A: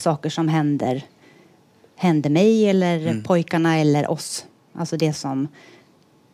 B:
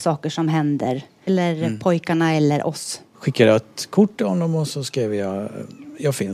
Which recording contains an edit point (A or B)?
B